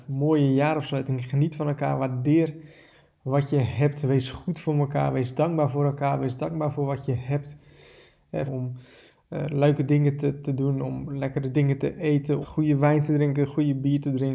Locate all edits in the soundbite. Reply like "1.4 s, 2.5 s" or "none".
8.5 s, 12.4 s

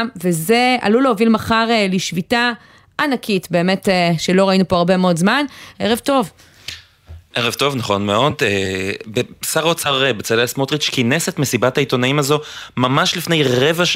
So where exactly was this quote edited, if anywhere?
5.7 s

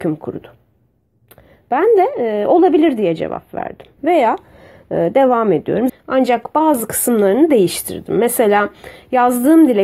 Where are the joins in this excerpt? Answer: 4.0 s, 5.9 s

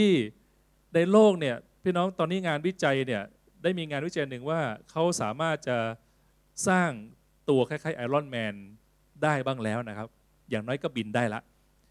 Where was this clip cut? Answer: none

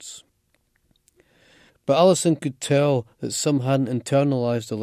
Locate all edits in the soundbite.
1.7 s

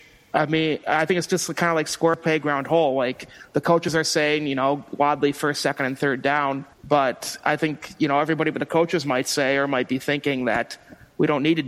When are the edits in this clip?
6.7 s

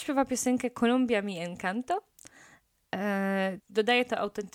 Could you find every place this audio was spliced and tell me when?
3.6 s

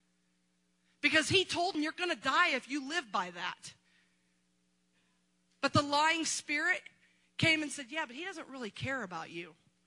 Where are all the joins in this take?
1.7 s

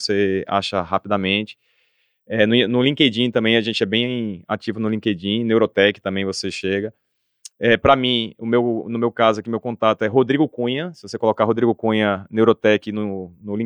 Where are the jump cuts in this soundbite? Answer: none

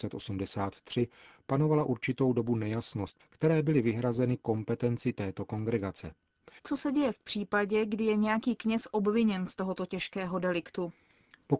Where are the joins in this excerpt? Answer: 3.2 s, 6.6 s

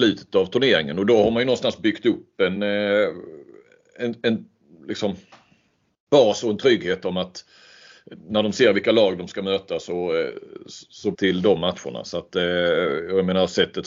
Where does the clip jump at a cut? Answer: 2.6 s, 11.1 s

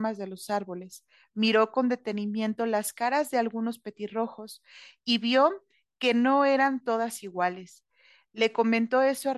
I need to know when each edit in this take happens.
none

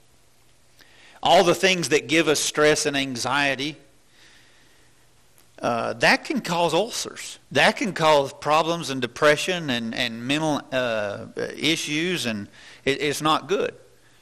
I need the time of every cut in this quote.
7.5 s

